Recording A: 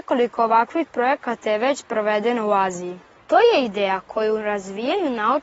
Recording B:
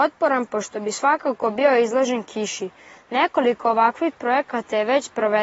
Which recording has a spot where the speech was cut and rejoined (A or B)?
A